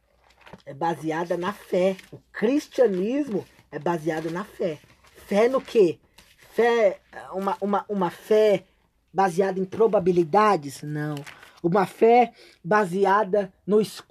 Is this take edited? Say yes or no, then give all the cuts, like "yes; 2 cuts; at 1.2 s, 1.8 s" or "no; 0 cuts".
yes; 1 cut; at 2.1 s